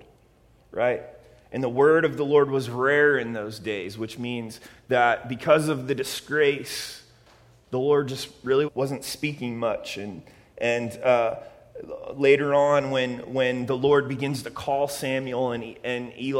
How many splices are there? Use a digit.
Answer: 1